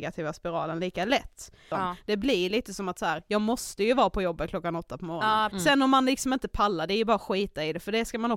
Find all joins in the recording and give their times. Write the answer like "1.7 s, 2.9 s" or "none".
1.7 s, 5.5 s